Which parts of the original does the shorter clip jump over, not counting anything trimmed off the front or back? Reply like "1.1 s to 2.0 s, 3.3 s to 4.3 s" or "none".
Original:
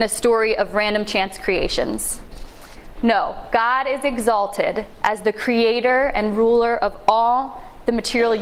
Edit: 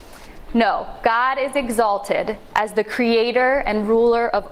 none

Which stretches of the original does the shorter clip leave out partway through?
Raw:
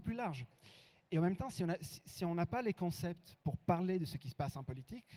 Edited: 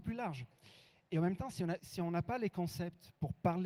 1.8 s to 2.0 s

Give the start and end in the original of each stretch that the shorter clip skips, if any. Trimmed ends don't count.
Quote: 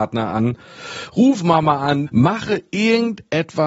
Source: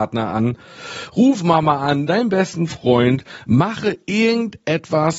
2.1 s to 3.4 s

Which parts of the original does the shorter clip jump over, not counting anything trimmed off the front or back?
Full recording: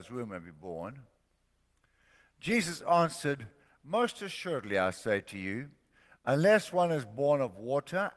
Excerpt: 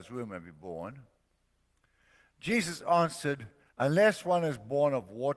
3.7 s to 6.2 s

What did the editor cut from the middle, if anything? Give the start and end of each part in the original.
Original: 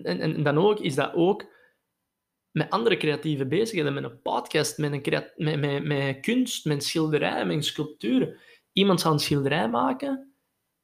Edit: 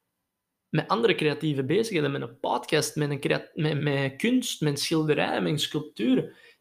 5.6 s to 5.8 s

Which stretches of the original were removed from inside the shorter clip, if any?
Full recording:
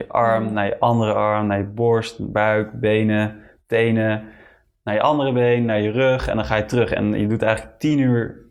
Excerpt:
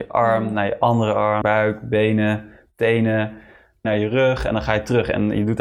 1.4 s to 2.3 s, 4.8 s to 5.7 s

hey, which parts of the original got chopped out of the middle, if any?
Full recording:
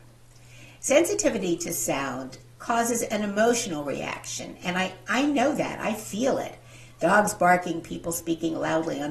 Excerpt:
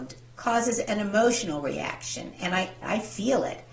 5.0 s to 5.8 s

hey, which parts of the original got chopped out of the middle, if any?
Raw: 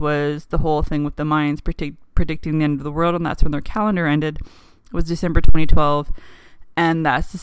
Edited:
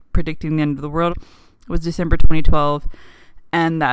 3.1 s to 4.3 s

